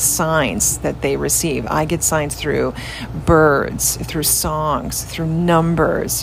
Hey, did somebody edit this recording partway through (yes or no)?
no